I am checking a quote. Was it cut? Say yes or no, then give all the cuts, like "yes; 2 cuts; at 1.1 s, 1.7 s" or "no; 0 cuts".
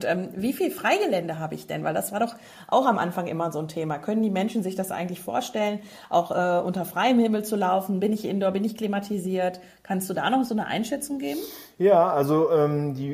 no; 0 cuts